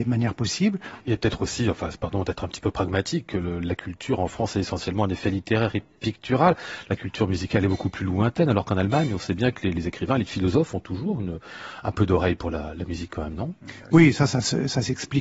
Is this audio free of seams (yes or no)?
no